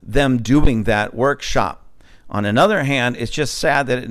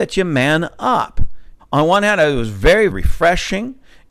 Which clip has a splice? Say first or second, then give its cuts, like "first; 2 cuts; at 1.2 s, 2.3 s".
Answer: second; 2 cuts; at 1.6 s, 2.9 s